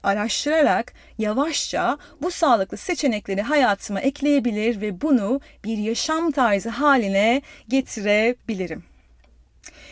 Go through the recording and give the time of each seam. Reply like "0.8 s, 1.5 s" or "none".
none

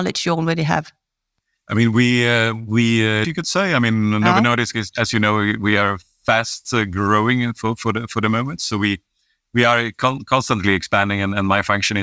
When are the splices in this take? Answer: 3.2 s

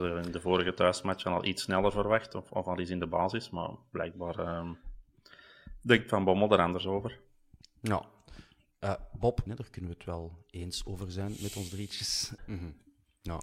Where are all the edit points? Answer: 9.5 s, 12.4 s

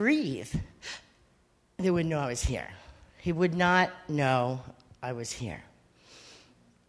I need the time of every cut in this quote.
none

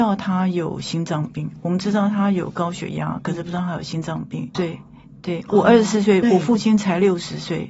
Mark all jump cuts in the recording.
4.5 s, 6.2 s

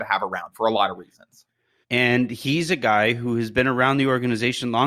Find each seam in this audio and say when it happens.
1.8 s

